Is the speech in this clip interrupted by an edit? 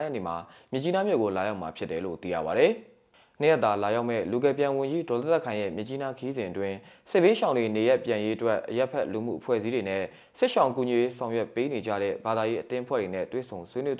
no; 0 cuts

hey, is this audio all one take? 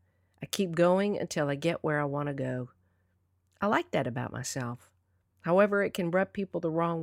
yes; 0 cuts

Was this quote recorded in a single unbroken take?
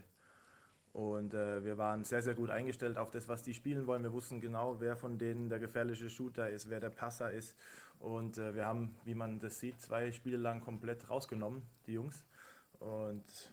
yes; 0 cuts

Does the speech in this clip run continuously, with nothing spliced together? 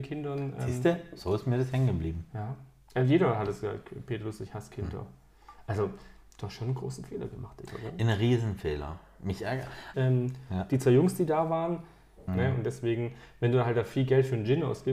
no; 2 cuts; at 9.9 s, 12.3 s

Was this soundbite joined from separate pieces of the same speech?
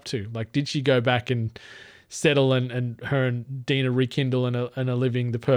no; 0 cuts

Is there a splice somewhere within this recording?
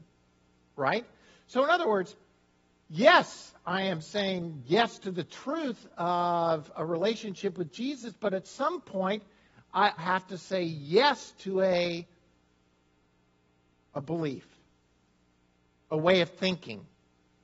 yes; 1 cut; at 10.0 s

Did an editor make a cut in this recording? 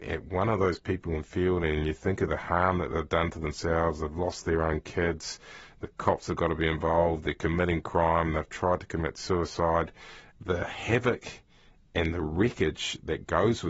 no; 0 cuts

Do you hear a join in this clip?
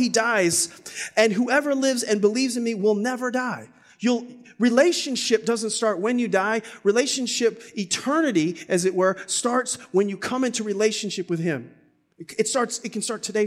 no; 0 cuts

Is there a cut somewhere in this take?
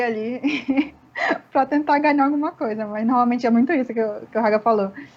no; 0 cuts

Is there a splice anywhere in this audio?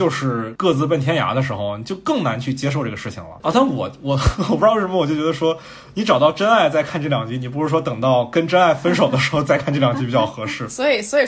no; 0 cuts

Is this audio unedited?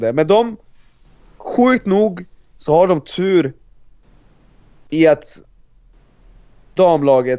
yes; 0 cuts

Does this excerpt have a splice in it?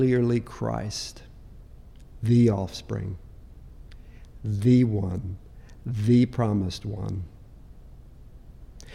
no; 0 cuts

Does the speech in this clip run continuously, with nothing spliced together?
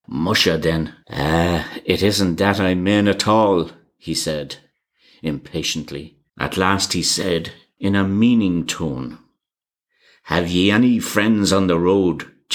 no; 2 cuts; at 1.0 s, 6.3 s

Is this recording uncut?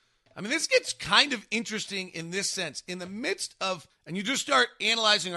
no; 1 cut; at 3.9 s

